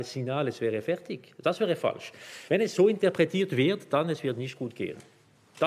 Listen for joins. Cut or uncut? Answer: uncut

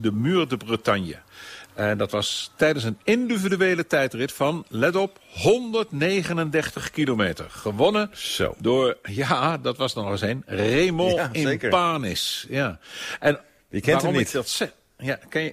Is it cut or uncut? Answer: uncut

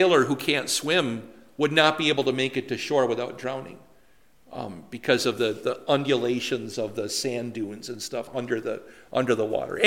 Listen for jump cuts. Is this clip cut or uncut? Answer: uncut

